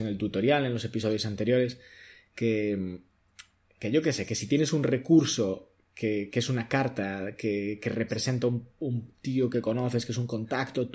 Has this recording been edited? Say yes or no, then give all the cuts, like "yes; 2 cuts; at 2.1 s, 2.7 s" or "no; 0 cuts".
no; 0 cuts